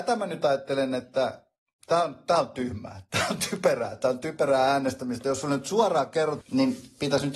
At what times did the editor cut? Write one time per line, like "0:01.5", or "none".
0:06.4